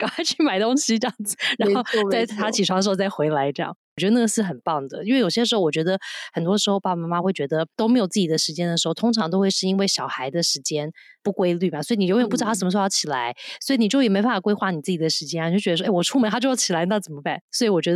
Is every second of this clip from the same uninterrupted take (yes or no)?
yes